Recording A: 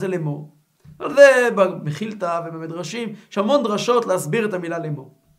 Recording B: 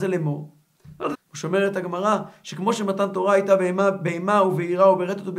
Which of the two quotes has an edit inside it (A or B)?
B